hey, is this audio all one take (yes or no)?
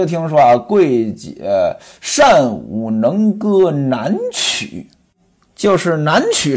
yes